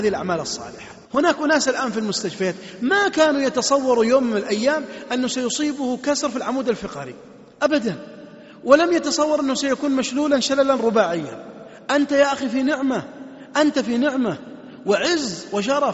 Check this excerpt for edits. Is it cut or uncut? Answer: cut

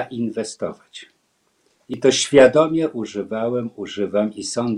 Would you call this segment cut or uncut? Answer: uncut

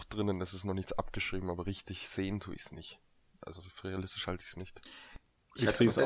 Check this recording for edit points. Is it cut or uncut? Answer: uncut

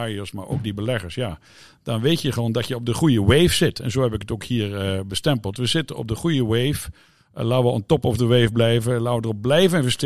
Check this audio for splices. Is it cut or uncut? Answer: uncut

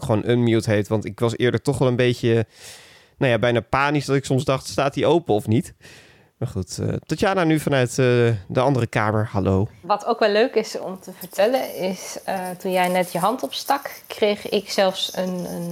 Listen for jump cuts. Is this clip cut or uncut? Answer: uncut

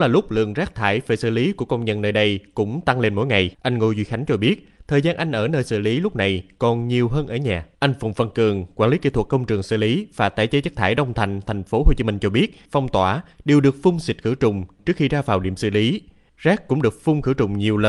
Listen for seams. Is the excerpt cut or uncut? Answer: cut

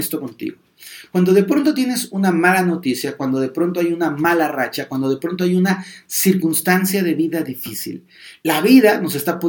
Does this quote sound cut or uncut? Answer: uncut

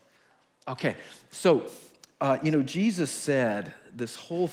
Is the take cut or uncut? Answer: uncut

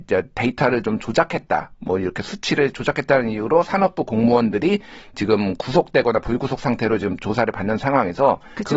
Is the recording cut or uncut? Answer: uncut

